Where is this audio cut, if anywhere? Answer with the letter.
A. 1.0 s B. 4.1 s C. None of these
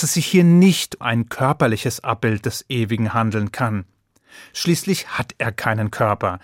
A